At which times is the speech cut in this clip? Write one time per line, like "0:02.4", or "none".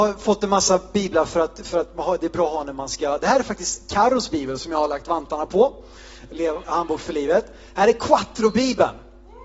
none